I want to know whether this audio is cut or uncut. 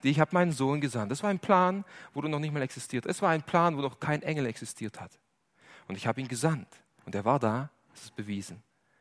uncut